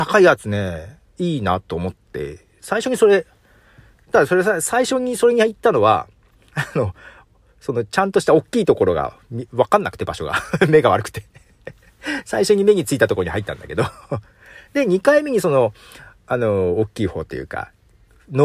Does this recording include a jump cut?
yes; 1 cut; at 1.2 s

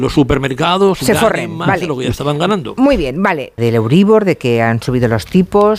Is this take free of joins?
no; 1 cut; at 3.6 s

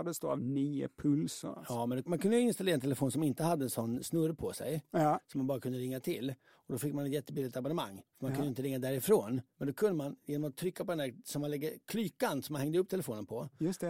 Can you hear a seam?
no; 0 cuts

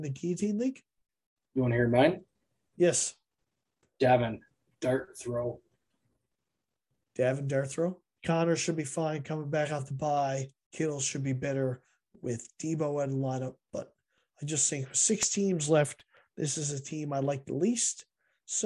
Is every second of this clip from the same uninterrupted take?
no; 1 cut; at 8.2 s

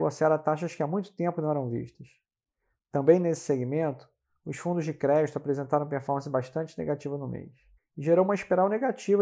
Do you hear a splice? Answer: yes; 1 cut; at 7.8 s

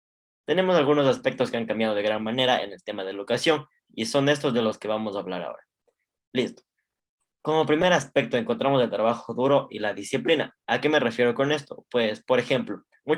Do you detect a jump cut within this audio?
yes; 1 cut; at 10.6 s

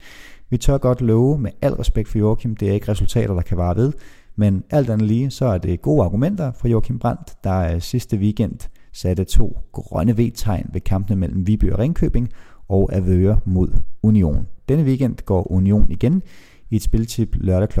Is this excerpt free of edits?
yes; 0 cuts

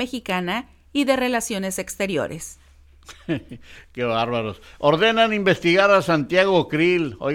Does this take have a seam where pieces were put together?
no; 0 cuts

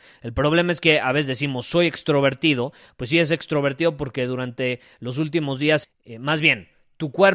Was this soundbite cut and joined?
yes; 1 cut; at 5.8 s

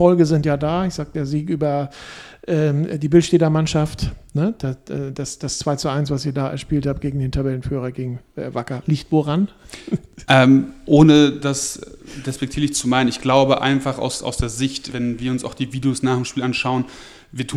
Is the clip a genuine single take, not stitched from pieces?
no; 2 cuts; at 8.8 s, 14.9 s

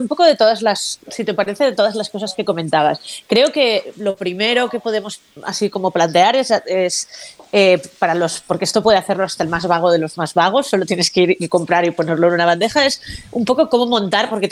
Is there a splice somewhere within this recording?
no; 0 cuts

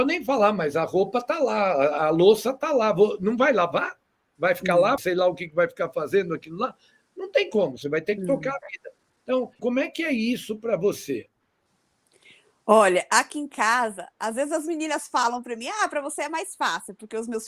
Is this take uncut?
no; 2 cuts; at 5.0 s, 9.6 s

